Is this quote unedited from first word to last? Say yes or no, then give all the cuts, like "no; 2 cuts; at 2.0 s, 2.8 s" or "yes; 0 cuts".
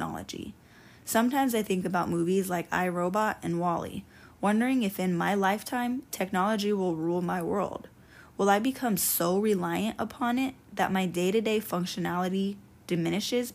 yes; 0 cuts